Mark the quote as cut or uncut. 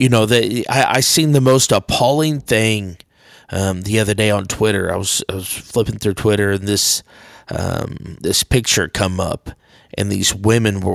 uncut